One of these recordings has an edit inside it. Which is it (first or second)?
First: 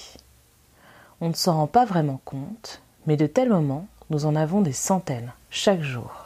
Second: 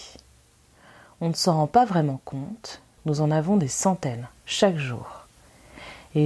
second